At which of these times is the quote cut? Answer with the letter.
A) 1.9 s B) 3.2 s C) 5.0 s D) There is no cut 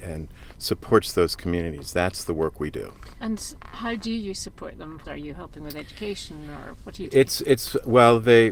C